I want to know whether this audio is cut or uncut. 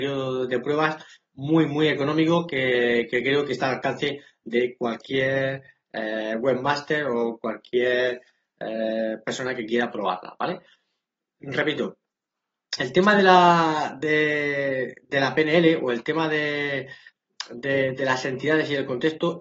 uncut